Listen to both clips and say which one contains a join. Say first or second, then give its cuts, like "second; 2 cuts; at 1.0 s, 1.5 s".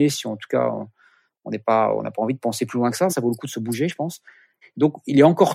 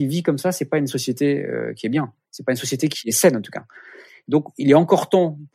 first; 2 cuts; at 3.1 s, 4.6 s